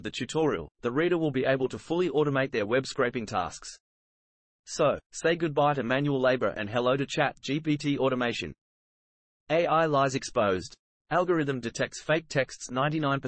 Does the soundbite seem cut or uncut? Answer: uncut